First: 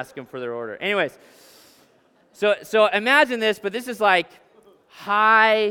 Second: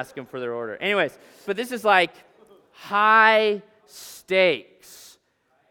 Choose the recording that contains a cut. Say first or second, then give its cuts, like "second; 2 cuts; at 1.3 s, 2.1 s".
second; 1 cut; at 1.4 s